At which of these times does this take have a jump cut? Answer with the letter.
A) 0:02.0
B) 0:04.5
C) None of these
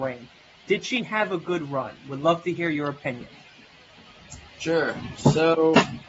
B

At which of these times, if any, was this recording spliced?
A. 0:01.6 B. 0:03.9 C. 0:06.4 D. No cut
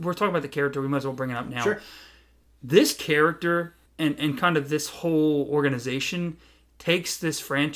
B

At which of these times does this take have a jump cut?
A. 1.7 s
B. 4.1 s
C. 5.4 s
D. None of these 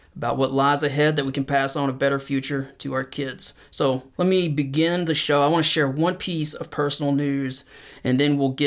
B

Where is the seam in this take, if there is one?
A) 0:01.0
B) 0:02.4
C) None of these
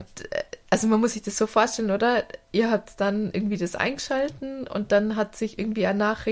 C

